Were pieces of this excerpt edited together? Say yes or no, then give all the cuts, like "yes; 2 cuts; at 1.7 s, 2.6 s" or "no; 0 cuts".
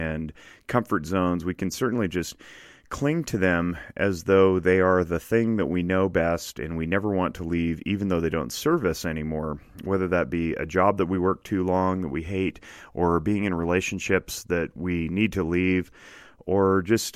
no; 0 cuts